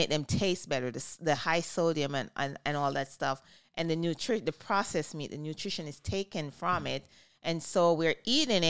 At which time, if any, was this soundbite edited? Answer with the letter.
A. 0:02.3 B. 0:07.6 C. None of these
C